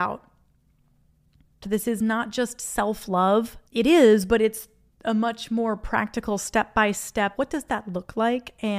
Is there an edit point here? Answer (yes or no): yes